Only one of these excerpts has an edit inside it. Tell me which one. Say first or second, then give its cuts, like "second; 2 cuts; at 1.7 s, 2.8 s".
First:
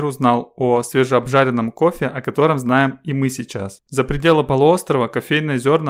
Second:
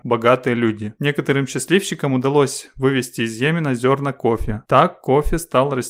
first; 1 cut; at 3.9 s